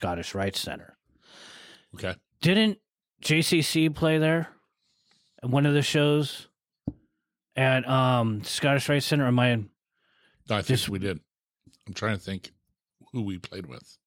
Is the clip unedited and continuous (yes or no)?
yes